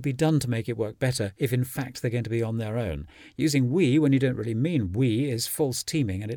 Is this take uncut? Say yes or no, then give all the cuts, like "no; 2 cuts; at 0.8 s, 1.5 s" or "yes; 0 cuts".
yes; 0 cuts